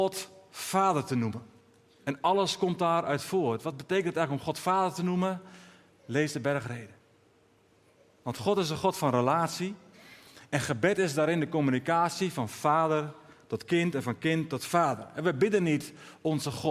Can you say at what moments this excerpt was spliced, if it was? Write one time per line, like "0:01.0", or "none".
none